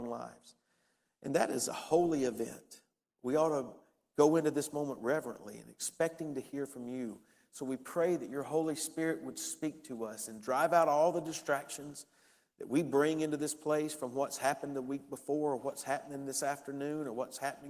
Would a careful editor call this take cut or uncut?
cut